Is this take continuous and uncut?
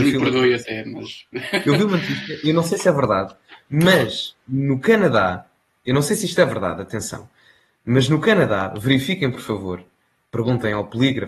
yes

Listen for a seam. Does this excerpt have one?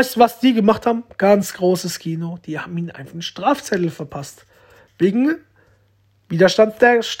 no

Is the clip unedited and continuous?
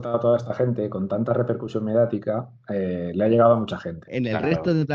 no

